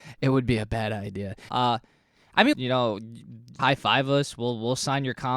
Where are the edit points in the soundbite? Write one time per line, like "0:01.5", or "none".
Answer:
0:01.5
0:02.5
0:03.6